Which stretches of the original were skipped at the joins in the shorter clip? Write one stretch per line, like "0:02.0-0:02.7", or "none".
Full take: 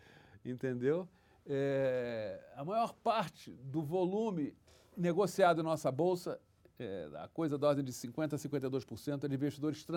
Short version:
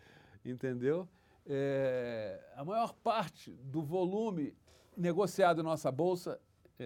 none